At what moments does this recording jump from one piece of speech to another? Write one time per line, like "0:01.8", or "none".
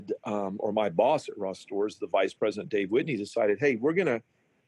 none